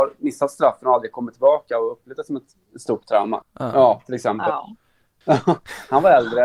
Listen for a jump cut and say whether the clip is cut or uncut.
cut